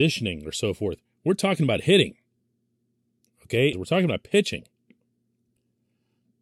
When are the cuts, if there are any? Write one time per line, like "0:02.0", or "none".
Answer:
0:03.7